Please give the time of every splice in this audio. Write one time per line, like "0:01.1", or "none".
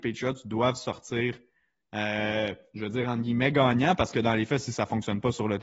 none

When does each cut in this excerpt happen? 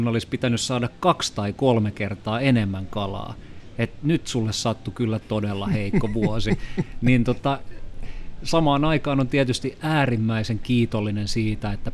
0:05.2

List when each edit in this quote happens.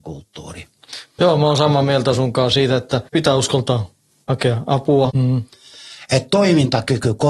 0:03.1
0:05.1

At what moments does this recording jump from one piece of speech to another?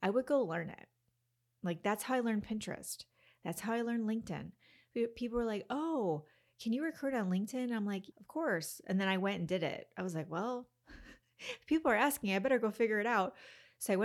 0:08.1

